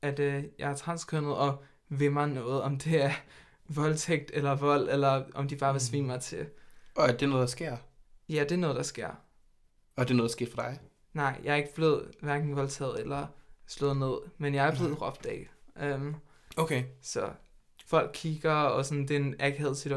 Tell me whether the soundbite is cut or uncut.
cut